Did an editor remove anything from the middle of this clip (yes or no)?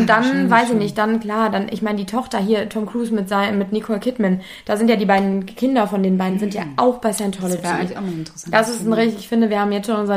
no